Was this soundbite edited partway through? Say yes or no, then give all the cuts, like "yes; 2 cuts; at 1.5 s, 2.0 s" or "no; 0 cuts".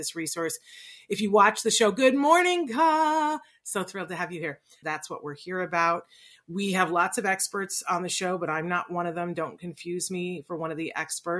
yes; 1 cut; at 4.8 s